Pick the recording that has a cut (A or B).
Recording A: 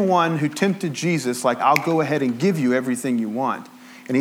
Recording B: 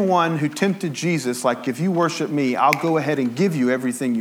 A